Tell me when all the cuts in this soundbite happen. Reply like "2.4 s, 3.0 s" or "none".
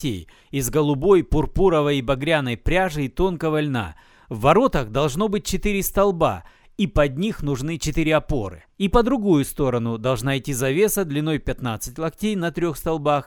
8.7 s